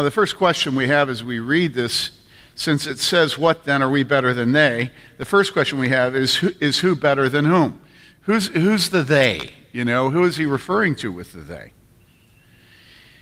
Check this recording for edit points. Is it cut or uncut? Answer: uncut